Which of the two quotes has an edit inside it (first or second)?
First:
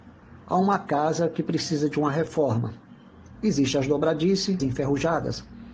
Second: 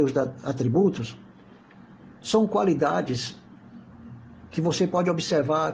first